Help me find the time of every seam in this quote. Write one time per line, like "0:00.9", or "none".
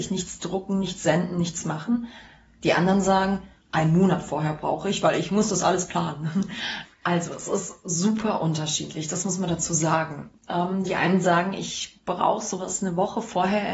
0:06.8